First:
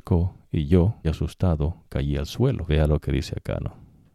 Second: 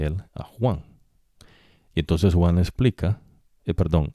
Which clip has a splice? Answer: first; 2 cuts; at 1.0 s, 2.7 s

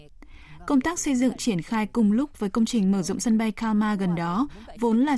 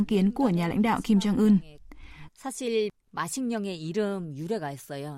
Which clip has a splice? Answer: second; 1 cut; at 2.3 s

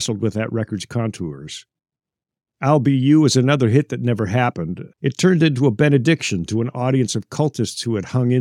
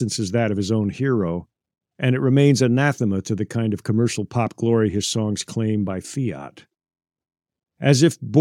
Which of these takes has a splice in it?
first; 2 cuts; at 2.5 s, 4.9 s

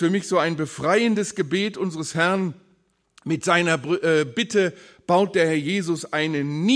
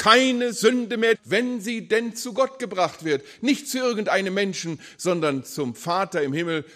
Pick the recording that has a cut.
second; 1 cut; at 1.1 s

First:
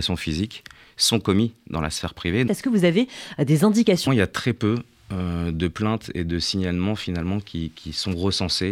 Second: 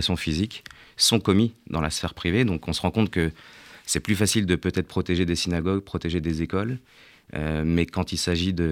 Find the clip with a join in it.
first; 2 cuts; at 2.5 s, 4.1 s

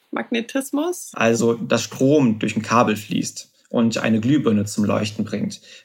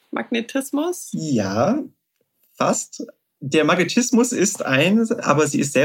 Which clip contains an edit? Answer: first; 1 cut; at 1.1 s

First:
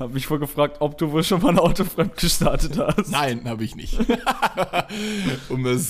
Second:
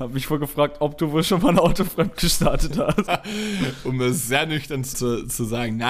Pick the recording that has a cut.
second; 2 cuts; at 3.1 s, 4.9 s

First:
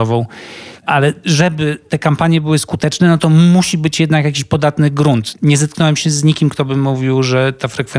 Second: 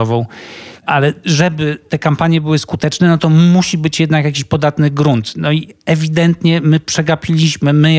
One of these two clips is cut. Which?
first; 1 cut; at 5.3 s

